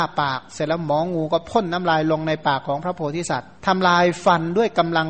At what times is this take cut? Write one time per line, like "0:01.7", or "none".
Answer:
0:03.6